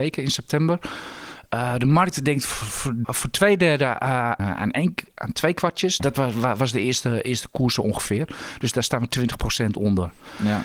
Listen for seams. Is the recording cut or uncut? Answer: cut